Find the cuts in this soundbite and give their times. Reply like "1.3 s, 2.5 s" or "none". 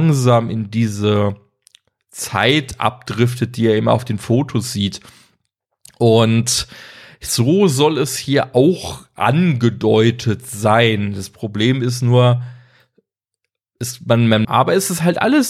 14.4 s